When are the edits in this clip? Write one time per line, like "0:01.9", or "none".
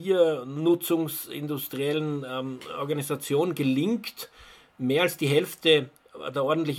none

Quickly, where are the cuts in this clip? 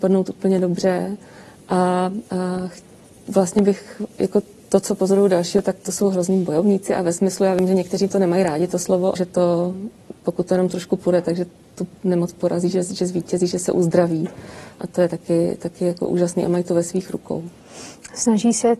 0:09.2

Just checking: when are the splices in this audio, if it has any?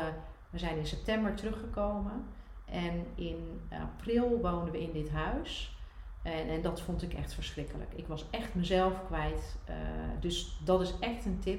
none

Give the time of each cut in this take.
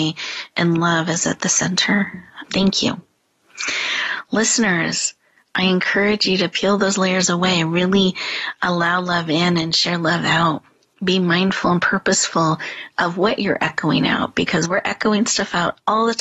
0:02.4

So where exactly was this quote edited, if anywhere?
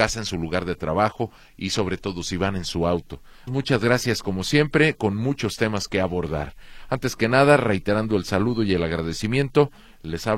0:03.5

